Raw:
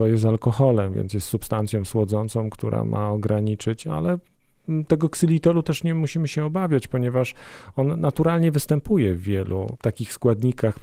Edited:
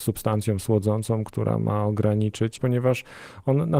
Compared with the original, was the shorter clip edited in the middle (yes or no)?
yes